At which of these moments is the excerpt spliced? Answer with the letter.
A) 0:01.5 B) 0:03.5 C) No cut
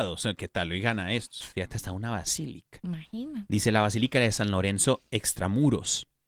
A